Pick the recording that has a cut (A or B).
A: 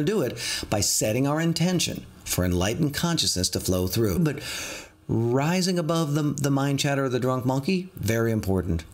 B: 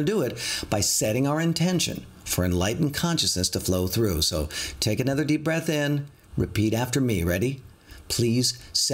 A